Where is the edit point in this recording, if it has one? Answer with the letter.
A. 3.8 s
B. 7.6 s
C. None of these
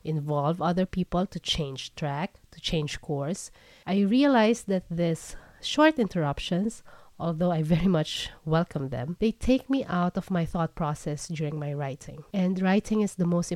A